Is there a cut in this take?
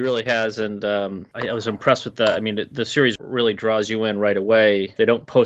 no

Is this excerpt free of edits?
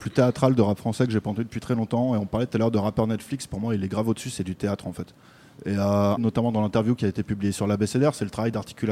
no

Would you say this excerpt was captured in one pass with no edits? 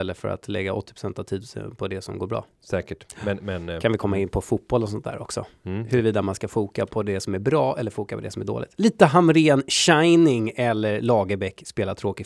no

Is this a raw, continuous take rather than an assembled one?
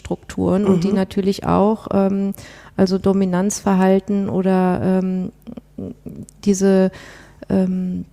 yes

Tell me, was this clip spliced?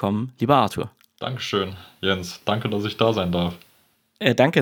no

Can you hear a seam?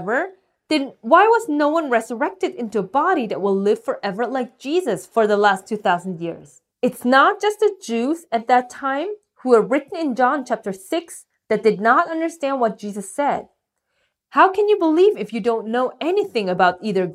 yes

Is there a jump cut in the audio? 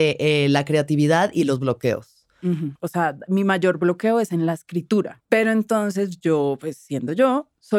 yes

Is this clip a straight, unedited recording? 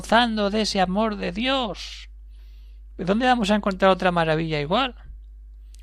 yes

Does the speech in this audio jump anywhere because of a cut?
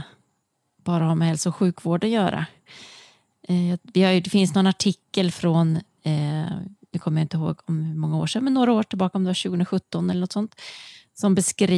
no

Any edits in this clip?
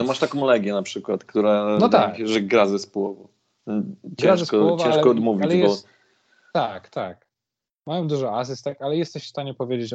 no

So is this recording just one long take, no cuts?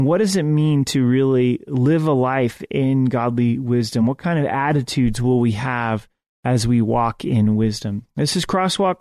yes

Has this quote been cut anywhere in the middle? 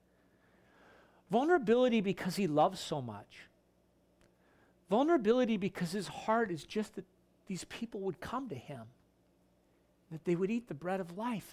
no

